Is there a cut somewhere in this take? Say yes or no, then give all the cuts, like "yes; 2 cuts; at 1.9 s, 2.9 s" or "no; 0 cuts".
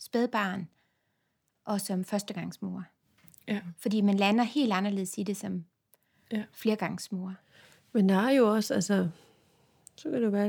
no; 0 cuts